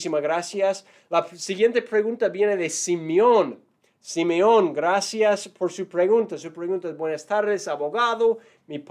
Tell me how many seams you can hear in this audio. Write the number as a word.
zero